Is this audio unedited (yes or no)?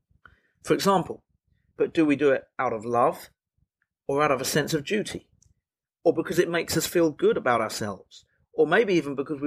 no